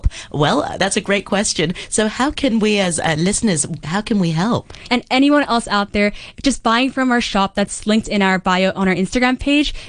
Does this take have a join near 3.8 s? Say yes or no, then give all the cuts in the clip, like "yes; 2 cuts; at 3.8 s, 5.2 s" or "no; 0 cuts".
yes; 2 cuts; at 3.8 s, 4.9 s